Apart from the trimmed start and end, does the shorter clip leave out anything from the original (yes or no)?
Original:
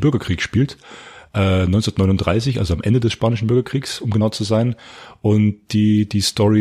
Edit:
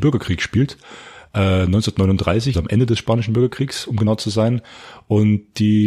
yes